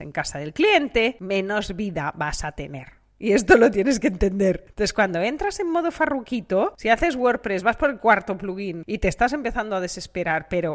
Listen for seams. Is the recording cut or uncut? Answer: uncut